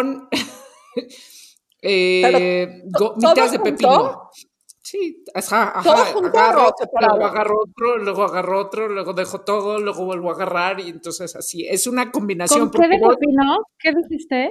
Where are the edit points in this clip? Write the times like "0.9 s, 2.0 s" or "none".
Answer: none